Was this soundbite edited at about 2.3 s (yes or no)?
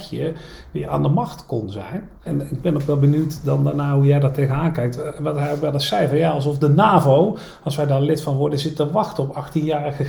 yes